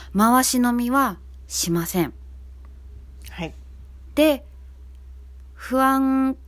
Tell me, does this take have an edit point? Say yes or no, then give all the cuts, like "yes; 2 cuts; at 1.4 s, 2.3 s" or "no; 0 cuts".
no; 0 cuts